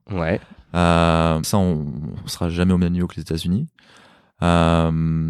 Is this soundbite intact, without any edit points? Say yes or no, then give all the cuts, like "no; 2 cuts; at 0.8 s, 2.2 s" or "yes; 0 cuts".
no; 1 cut; at 1.4 s